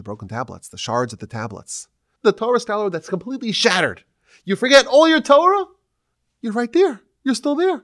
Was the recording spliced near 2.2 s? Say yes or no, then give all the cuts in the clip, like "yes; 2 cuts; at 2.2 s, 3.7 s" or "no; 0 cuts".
yes; 1 cut; at 2.2 s